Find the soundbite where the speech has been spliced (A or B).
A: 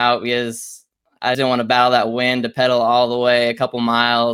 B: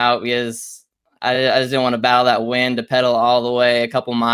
A